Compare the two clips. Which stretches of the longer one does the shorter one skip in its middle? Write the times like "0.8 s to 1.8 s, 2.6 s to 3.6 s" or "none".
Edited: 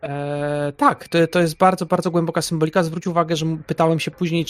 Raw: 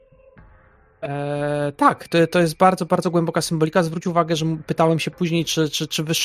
none